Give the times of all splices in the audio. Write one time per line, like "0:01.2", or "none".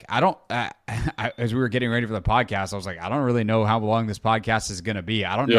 none